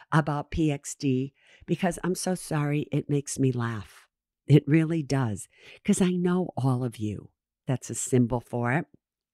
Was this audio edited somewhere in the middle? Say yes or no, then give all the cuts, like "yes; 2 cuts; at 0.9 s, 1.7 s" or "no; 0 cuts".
yes; 1 cut; at 7.7 s